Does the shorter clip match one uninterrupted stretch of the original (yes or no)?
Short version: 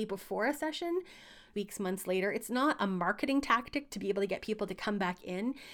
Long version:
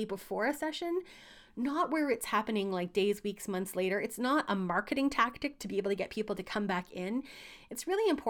no